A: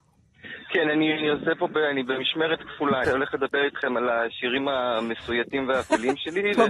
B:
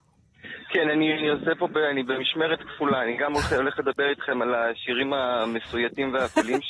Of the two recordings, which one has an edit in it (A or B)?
A